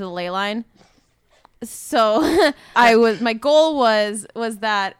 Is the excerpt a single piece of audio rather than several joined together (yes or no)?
no